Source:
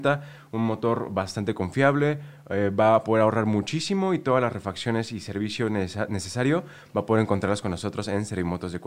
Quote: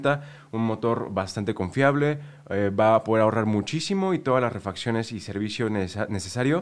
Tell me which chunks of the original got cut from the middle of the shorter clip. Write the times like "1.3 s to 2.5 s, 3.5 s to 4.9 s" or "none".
none